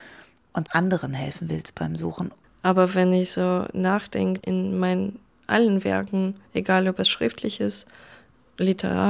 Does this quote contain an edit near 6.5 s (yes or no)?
no